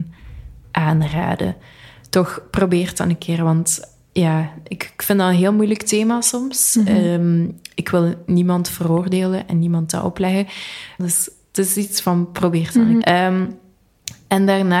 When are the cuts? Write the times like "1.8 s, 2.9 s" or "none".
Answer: 11.0 s, 13.0 s